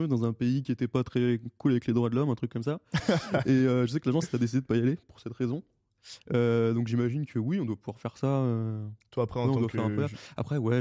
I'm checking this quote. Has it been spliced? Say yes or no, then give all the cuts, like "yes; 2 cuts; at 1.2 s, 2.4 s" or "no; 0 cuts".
no; 0 cuts